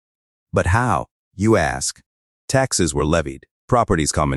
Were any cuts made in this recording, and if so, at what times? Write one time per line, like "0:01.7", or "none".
0:02.3